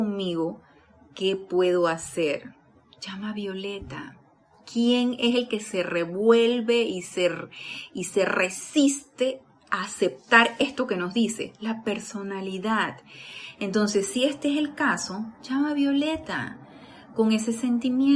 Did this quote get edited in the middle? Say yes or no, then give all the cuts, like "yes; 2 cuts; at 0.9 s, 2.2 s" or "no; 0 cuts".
no; 0 cuts